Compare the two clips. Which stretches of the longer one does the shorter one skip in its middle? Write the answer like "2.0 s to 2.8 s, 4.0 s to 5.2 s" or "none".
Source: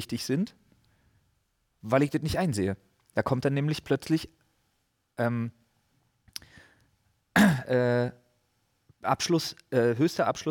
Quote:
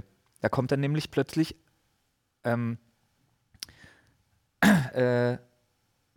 none